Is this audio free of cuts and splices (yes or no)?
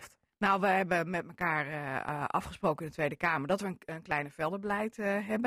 yes